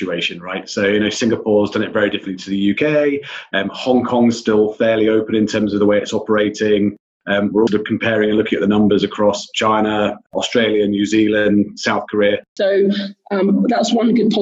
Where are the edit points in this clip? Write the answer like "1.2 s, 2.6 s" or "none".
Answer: 7.7 s, 12.6 s